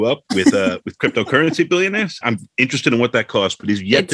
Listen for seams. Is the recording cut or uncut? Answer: cut